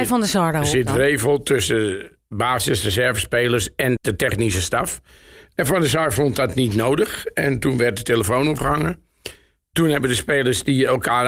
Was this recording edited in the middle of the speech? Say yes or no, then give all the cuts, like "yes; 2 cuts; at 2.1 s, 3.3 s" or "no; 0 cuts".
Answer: yes; 1 cut; at 4.0 s